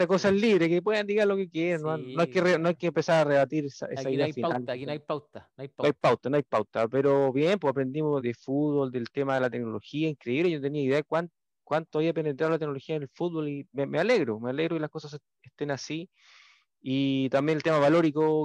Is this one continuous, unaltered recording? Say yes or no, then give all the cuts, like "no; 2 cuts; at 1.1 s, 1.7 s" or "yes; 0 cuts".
no; 1 cut; at 8.2 s